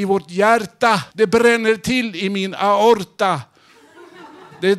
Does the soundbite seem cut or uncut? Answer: cut